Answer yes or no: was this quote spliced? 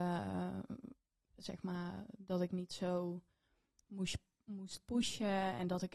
no